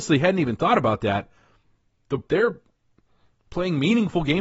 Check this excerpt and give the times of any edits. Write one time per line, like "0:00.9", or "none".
0:02.3